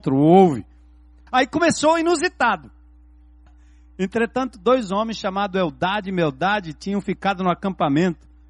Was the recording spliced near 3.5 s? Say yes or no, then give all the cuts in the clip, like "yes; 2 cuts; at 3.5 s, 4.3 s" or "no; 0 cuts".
yes; 2 cuts; at 1.3 s, 3.5 s